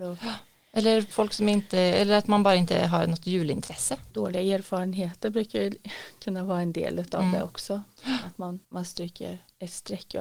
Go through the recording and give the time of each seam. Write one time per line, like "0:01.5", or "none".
0:04.1
0:08.6